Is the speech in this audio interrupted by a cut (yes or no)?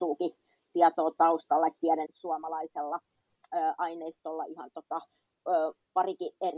yes